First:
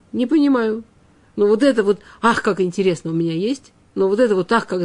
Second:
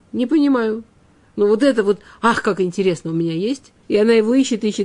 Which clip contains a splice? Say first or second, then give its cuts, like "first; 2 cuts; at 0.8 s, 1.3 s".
second; 1 cut; at 3.8 s